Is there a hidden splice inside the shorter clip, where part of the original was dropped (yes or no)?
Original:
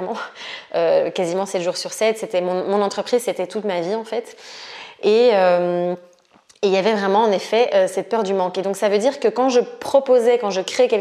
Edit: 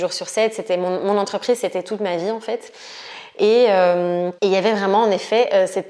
yes